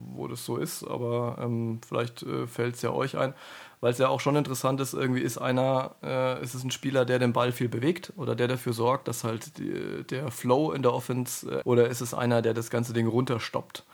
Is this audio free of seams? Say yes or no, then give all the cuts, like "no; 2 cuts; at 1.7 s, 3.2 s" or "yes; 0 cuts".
no; 1 cut; at 11.6 s